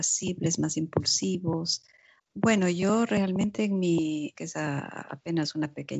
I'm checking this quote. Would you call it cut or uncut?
cut